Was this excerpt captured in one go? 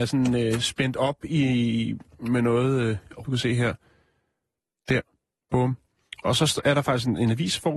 no; 1 cut; at 3.2 s

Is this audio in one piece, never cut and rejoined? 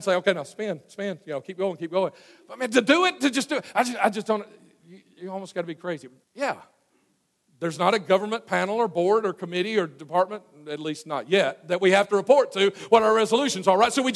no; 1 cut; at 6.2 s

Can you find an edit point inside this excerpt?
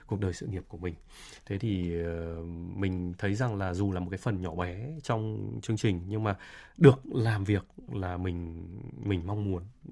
no; 0 cuts

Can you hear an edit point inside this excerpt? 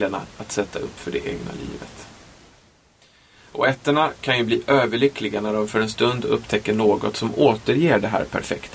no; 0 cuts

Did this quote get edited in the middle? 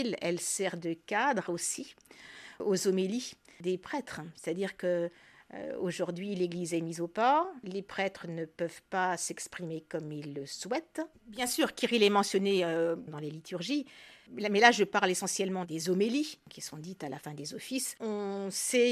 yes; 2 cuts; at 11.1 s, 18.0 s

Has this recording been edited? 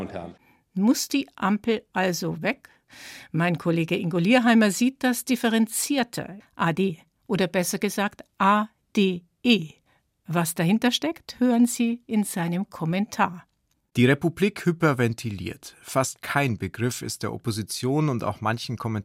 yes; 1 cut; at 6.4 s

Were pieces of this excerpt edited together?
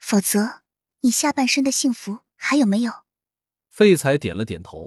yes; 1 cut; at 3.6 s

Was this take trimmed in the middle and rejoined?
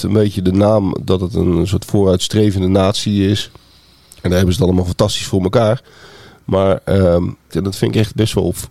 yes; 1 cut; at 7.5 s

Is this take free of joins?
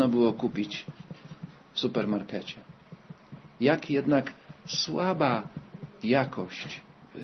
no; 1 cut; at 6.0 s

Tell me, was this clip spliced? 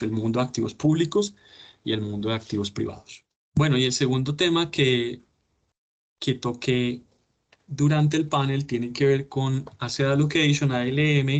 no; 0 cuts

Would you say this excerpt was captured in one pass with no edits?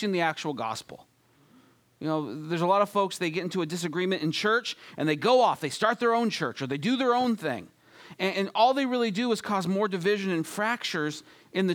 no; 1 cut; at 8.3 s

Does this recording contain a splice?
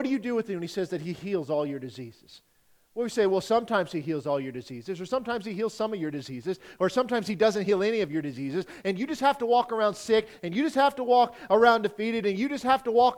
no; 0 cuts

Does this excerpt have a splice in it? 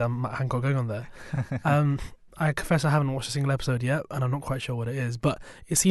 no; 0 cuts

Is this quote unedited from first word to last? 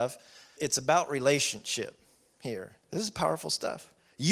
no; 1 cut; at 2.8 s

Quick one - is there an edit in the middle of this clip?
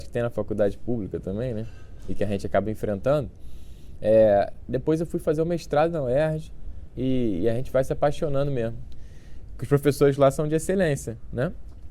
yes; 2 cuts; at 6.9 s, 9.5 s

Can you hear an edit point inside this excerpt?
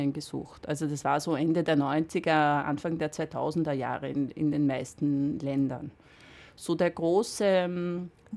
no; 0 cuts

